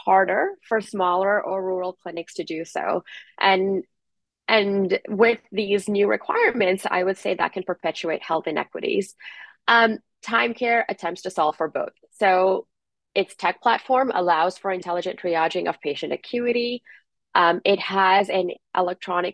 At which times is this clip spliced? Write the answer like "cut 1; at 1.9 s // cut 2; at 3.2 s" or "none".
none